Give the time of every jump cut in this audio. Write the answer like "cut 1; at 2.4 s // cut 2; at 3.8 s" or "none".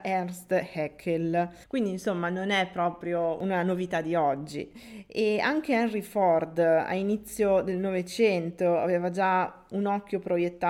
none